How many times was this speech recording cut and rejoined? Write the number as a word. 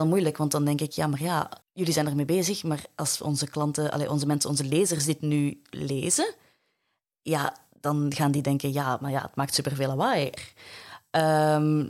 two